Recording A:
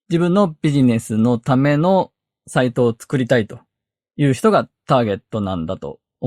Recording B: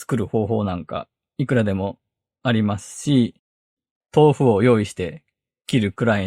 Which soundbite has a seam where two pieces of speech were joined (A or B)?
B